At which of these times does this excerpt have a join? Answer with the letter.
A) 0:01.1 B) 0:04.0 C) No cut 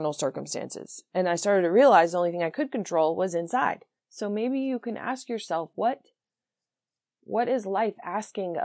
B